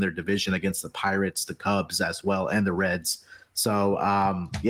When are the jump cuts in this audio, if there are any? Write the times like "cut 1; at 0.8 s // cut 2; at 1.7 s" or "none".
none